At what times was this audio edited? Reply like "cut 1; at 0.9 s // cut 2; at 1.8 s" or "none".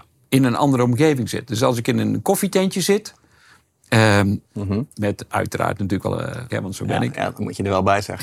cut 1; at 4.5 s // cut 2; at 6.5 s